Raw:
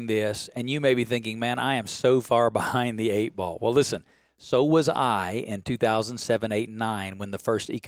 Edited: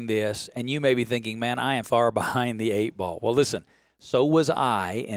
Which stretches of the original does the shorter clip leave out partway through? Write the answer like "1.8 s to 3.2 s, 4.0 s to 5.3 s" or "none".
1.8 s to 2.2 s